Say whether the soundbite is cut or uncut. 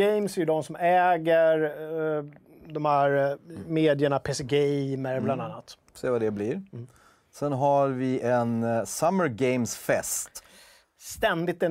uncut